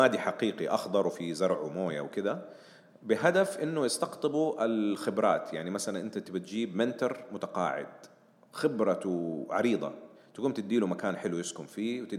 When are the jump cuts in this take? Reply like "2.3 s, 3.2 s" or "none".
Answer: none